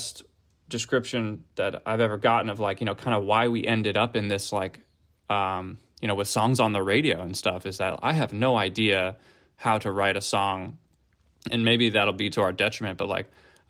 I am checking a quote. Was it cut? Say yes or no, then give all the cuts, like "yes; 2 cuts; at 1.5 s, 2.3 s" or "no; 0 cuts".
no; 0 cuts